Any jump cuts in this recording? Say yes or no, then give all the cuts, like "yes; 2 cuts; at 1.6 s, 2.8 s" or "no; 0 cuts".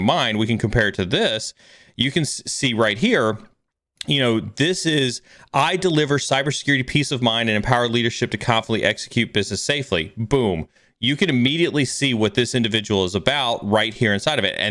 no; 0 cuts